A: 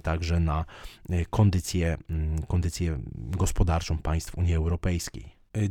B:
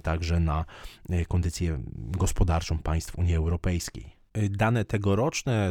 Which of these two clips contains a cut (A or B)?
B